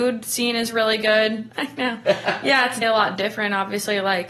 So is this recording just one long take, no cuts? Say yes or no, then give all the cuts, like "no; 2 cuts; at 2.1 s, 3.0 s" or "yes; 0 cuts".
no; 2 cuts; at 1.5 s, 2.8 s